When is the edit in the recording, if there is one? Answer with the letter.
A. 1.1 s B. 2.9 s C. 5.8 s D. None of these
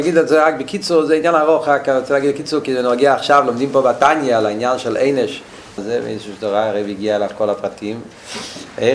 C